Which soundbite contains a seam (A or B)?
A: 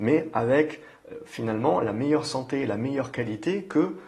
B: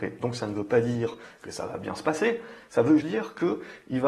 B